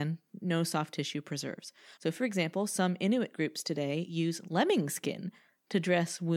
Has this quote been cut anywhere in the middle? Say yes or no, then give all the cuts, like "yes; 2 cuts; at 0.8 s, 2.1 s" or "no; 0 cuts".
yes; 1 cut; at 2.0 s